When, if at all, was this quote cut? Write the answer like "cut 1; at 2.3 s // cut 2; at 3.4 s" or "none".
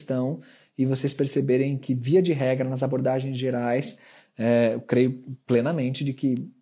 none